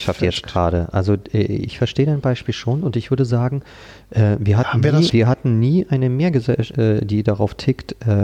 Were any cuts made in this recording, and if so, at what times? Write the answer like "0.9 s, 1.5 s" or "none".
5.1 s, 6.7 s